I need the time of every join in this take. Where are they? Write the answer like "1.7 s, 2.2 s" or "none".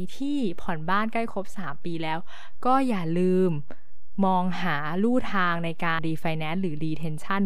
6.0 s